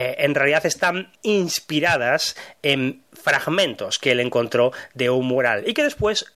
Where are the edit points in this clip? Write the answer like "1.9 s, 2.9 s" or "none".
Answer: 1.2 s